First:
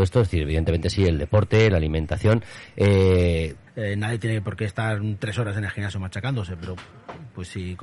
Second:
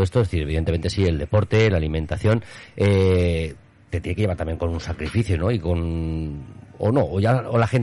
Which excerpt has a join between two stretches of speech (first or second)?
first